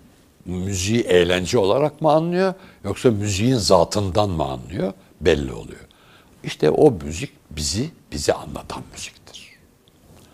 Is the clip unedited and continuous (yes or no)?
yes